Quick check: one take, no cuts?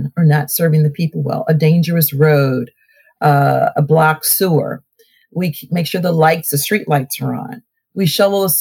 yes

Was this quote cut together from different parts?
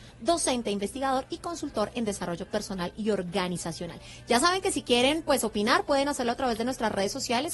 no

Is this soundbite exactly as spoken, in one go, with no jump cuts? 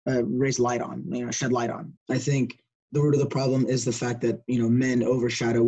no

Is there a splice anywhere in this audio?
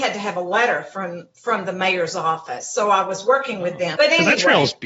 yes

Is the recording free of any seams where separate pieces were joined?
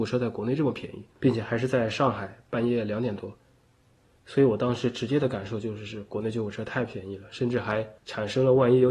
yes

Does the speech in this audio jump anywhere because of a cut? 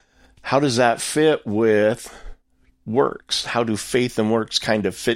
no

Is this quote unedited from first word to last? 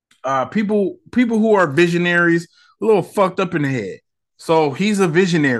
yes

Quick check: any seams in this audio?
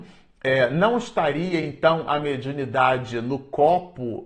no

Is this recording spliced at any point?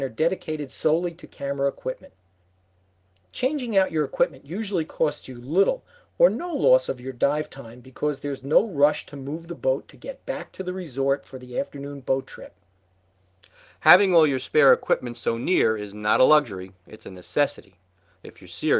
no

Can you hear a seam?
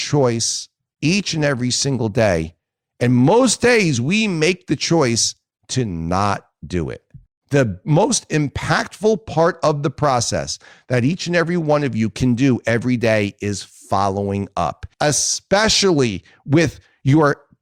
yes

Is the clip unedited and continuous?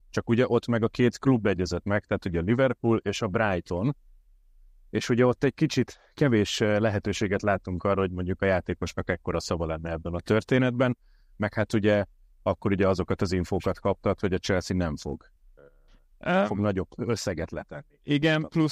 yes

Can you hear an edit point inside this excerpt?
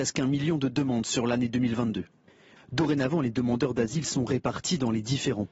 yes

